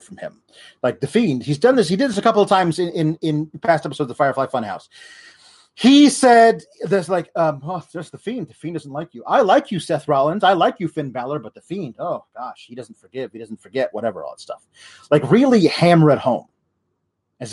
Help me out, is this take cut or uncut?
uncut